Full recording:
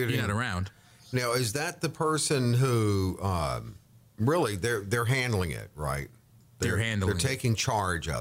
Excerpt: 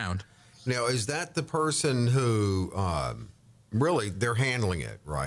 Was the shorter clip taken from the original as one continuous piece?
no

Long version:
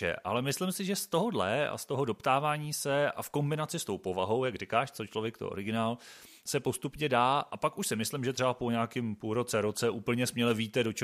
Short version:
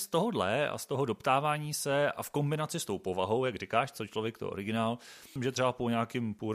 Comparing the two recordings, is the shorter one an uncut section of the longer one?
no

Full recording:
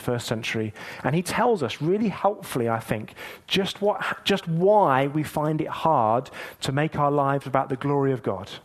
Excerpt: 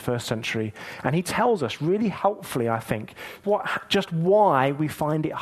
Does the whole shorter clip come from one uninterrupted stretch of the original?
no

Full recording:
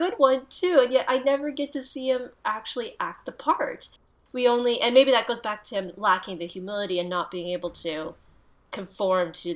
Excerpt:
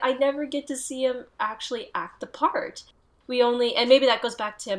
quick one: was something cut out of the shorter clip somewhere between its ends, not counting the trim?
no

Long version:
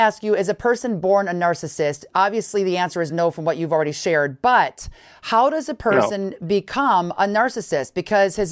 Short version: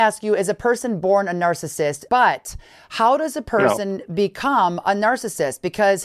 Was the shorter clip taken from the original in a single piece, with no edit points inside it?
no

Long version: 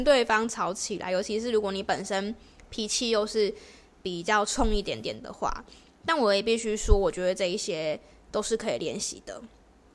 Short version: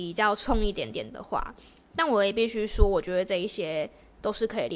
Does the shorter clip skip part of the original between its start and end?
no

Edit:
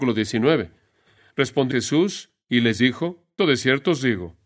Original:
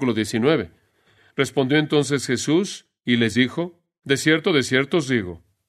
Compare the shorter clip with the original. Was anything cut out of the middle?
yes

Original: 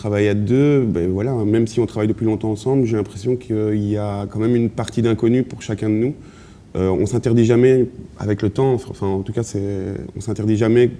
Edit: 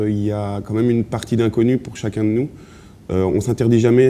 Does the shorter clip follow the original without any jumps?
yes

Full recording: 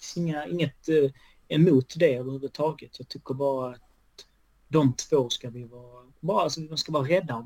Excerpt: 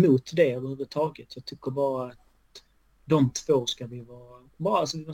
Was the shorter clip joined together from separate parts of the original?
no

